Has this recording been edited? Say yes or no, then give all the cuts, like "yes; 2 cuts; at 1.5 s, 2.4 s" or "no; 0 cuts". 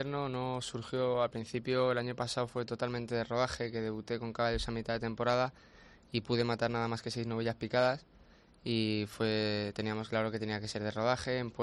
no; 0 cuts